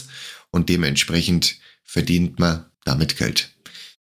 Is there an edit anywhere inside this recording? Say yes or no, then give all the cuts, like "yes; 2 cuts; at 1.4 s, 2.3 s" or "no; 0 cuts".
yes; 1 cut; at 2.7 s